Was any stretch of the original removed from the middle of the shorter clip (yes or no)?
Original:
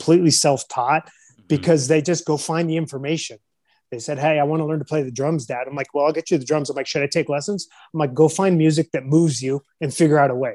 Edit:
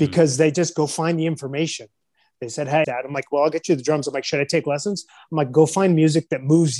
yes